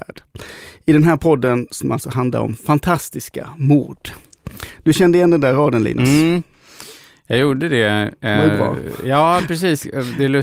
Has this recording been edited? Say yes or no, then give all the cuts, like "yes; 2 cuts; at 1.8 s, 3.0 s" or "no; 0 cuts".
no; 0 cuts